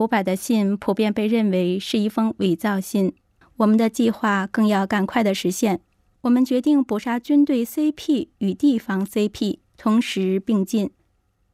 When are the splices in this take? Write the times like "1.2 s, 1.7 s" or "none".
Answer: 3.4 s

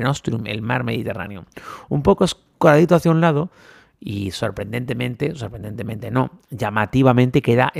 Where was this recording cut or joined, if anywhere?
none

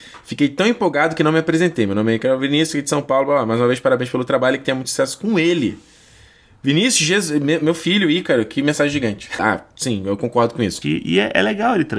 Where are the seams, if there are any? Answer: 9.4 s, 10.8 s

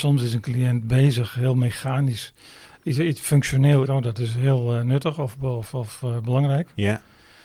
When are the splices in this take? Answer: 3.9 s

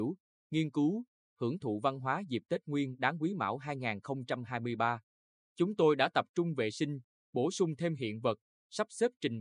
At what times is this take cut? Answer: 5.4 s

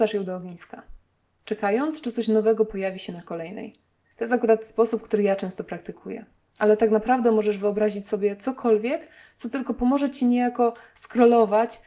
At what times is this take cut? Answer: none

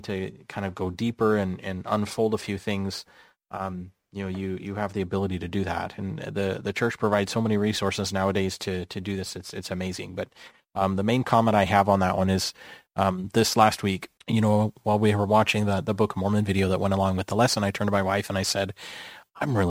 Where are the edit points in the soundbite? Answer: 14.2 s

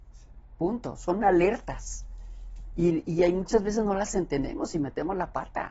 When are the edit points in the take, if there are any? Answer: none

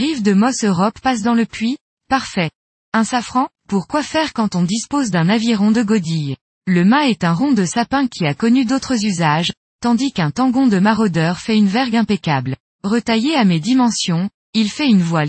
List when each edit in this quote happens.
12.7 s

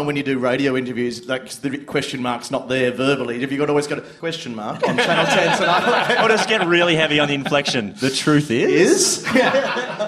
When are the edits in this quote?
4.2 s

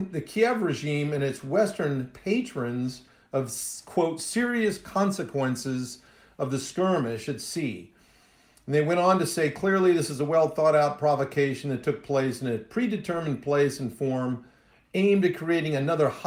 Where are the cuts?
none

